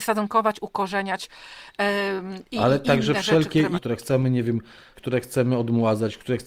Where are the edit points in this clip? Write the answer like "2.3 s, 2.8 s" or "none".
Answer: 3.7 s, 5.0 s